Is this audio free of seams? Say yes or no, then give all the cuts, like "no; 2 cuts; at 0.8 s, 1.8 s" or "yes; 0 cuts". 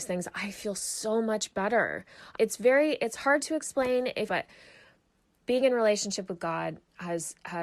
no; 1 cut; at 2.4 s